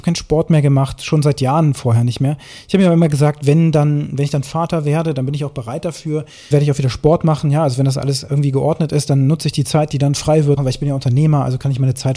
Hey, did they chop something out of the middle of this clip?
yes; 2 cuts; at 6.5 s, 10.6 s

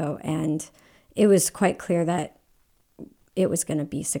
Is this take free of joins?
yes; 0 cuts

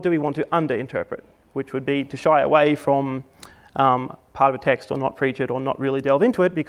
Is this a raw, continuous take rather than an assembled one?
yes; 0 cuts

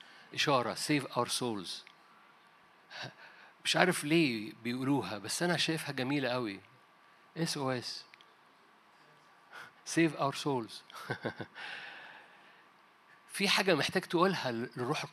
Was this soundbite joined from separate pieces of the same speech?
no; 0 cuts

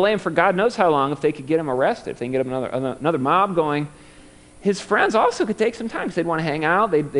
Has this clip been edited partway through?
no; 0 cuts

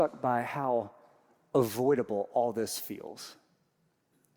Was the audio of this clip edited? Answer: no; 0 cuts

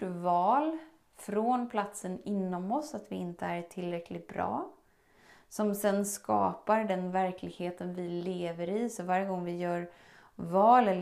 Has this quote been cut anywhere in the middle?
no; 0 cuts

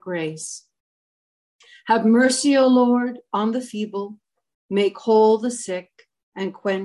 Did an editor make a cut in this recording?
no; 0 cuts

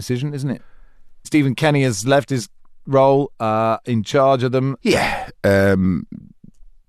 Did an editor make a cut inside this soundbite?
yes; 2 cuts; at 1.2 s, 4.8 s

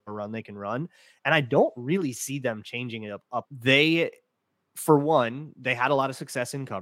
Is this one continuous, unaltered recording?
no; 1 cut; at 3.5 s

